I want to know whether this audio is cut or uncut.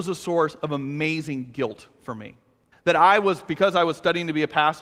cut